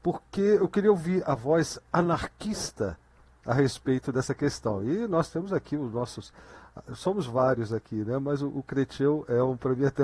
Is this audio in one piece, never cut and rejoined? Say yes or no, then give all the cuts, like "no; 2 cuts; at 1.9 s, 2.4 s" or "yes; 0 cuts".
yes; 0 cuts